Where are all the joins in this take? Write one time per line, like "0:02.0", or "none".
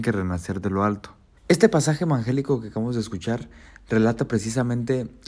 0:01.4